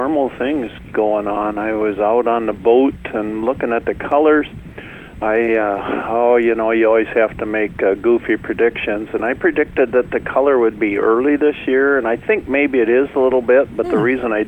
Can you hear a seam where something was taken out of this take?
no; 0 cuts

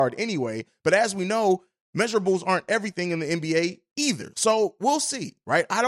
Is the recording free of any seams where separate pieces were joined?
no; 1 cut; at 4.3 s

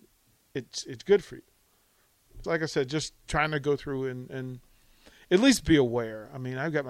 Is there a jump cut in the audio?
yes; 1 cut; at 2.4 s

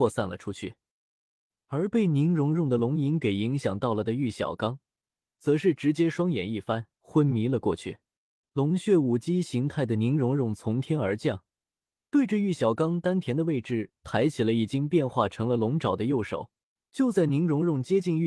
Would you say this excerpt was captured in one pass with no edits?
no; 3 cuts; at 6.9 s, 8.4 s, 16.8 s

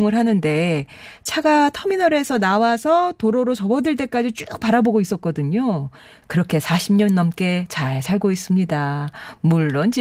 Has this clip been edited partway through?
yes; 1 cut; at 6.2 s

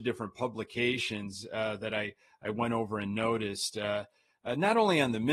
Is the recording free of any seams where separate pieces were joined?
yes; 0 cuts

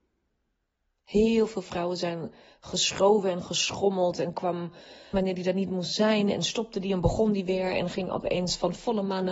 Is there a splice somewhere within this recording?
yes; 1 cut; at 5.1 s

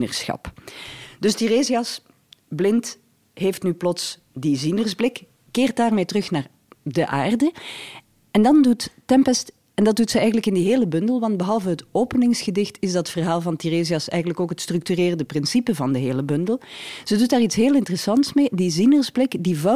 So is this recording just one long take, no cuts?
yes; 0 cuts

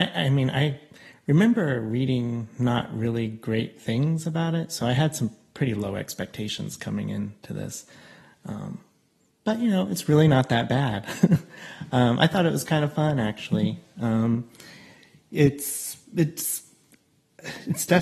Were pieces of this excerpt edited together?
no; 0 cuts

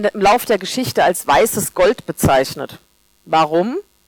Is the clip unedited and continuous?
yes; 0 cuts

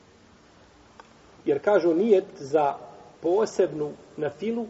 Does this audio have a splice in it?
yes; 2 cuts; at 1.4 s, 3.1 s

